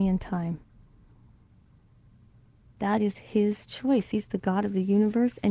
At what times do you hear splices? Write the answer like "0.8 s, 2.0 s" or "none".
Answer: none